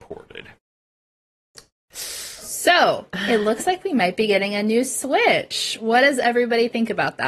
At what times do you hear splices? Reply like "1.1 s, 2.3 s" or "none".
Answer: none